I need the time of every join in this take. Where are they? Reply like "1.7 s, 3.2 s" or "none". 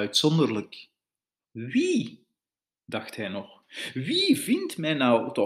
1.4 s

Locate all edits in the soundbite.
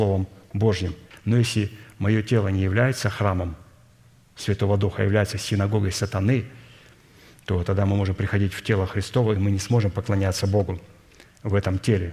1.1 s

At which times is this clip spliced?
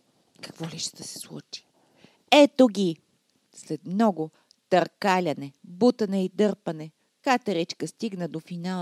5.6 s

